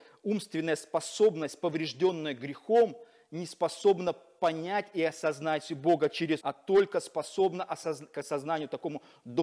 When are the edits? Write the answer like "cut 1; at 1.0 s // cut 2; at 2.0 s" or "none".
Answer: cut 1; at 6.4 s